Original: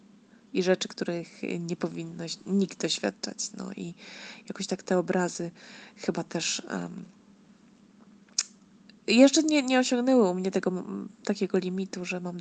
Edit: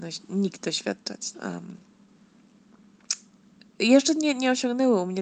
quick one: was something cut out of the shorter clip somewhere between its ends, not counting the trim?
yes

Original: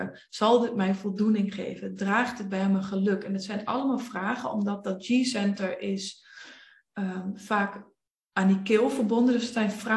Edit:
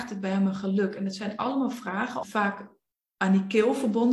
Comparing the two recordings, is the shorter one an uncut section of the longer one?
no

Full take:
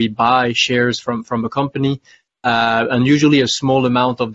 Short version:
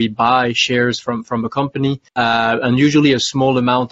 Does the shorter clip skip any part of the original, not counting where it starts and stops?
yes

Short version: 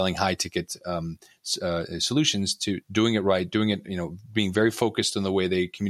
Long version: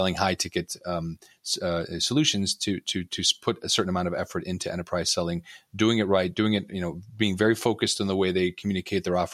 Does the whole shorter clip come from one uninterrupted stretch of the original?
no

